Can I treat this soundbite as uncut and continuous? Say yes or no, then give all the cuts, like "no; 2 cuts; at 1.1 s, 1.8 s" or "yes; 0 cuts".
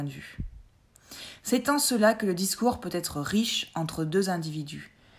yes; 0 cuts